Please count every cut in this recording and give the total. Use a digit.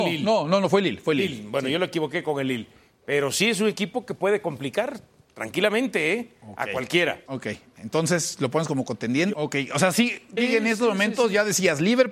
3